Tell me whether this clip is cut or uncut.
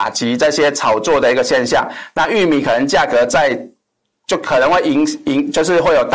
uncut